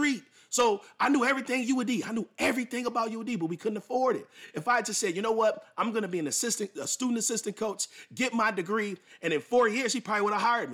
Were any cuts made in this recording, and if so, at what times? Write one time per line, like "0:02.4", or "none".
none